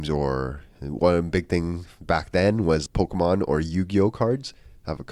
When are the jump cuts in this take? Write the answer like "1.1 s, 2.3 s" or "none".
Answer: 2.9 s